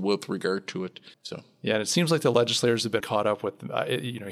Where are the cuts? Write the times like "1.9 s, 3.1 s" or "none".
1.1 s, 3.0 s